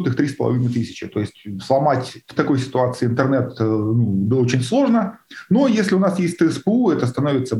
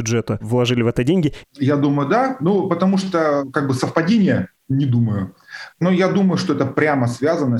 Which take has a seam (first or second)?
second